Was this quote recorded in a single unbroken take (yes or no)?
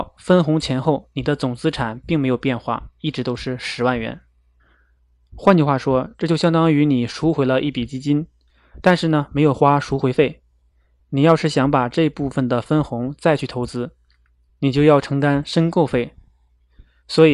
yes